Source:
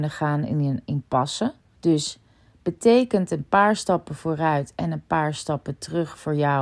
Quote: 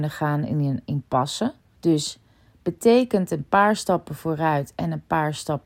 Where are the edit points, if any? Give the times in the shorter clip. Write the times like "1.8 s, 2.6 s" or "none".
none